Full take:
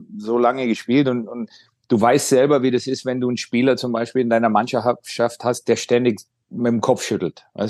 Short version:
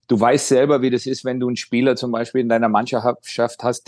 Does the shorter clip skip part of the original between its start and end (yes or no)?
no